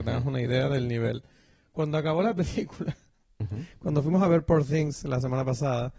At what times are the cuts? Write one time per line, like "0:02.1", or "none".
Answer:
none